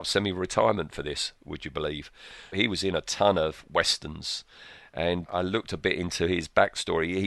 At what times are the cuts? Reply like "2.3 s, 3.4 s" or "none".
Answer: 2.5 s, 5.3 s